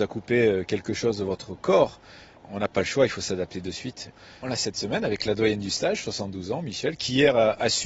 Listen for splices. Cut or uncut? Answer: cut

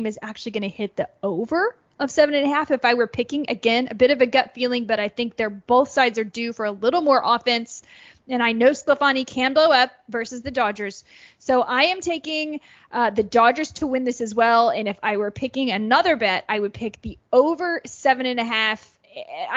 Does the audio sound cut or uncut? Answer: uncut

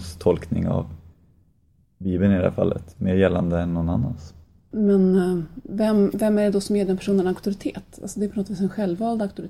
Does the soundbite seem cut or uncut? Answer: cut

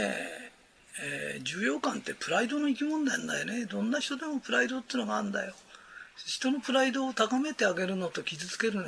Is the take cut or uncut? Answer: uncut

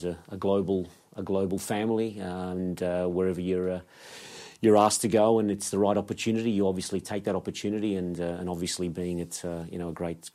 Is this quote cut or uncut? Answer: uncut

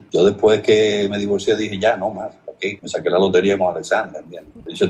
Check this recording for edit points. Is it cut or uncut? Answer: uncut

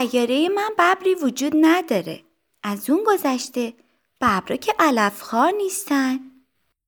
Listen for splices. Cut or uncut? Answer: uncut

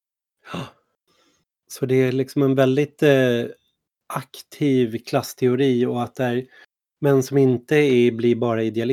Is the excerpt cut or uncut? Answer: uncut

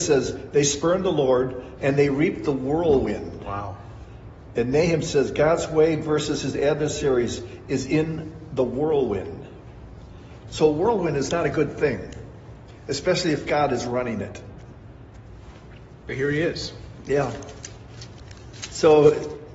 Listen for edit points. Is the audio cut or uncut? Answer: cut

